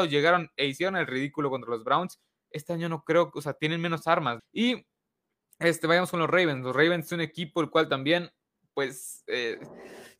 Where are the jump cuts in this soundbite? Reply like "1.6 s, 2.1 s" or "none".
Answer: 4.4 s